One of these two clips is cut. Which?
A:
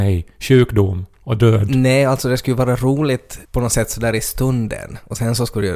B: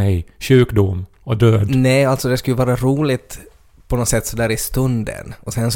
A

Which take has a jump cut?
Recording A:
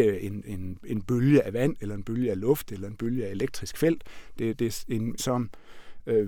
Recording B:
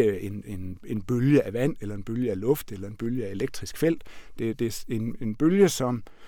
A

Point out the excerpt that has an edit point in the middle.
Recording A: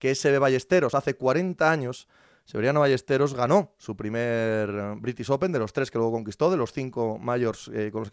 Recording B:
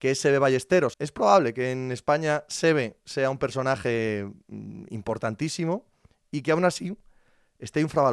B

